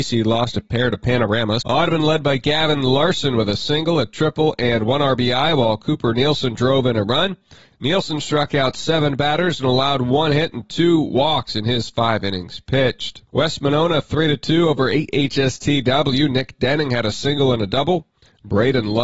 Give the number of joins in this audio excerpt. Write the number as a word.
three